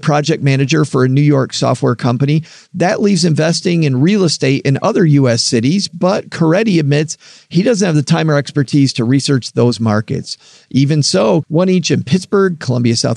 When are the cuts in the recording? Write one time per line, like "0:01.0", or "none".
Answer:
0:11.4

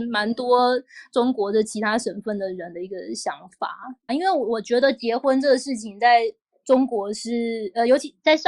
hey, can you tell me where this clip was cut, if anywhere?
0:04.1

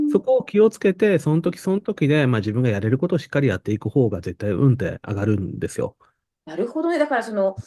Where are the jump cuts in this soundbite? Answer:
none

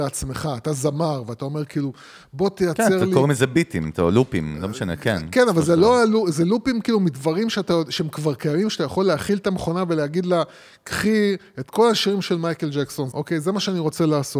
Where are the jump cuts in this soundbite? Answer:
0:13.1

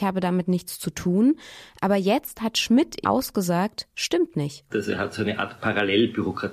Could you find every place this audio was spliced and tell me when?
0:03.0
0:04.7

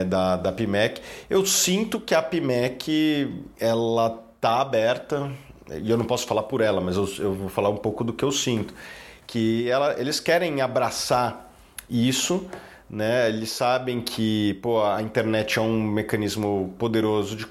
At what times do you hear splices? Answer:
0:03.5

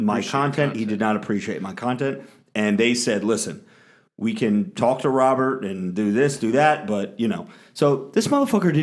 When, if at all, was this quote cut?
none

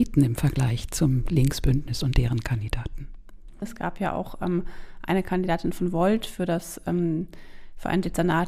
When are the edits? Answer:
0:03.6

